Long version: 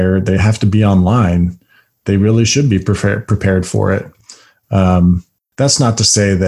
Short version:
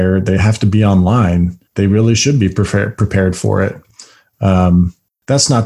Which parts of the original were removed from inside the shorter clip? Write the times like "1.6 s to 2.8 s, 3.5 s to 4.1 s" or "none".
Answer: 1.7 s to 2.0 s